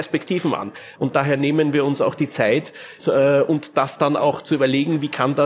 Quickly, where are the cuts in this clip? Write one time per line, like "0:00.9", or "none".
0:00.9
0:03.0